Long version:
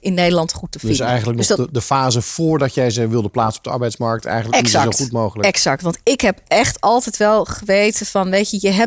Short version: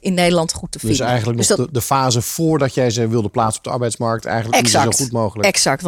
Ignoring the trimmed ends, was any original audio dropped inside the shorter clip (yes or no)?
no